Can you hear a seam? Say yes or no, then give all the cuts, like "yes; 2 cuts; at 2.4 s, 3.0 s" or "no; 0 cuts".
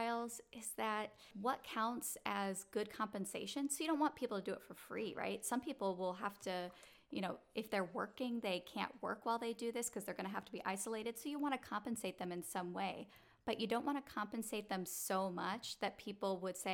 no; 0 cuts